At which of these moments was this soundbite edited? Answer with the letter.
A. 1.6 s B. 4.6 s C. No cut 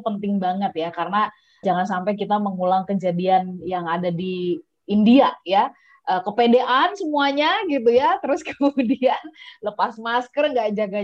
A